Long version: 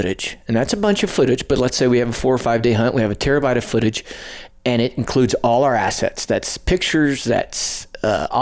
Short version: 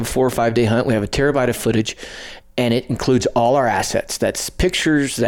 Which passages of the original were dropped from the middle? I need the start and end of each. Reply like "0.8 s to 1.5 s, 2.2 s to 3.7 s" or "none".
none